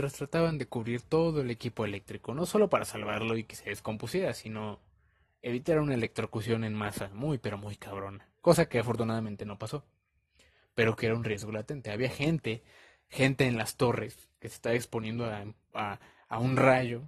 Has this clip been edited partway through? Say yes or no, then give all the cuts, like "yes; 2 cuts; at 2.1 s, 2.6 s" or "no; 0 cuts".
no; 0 cuts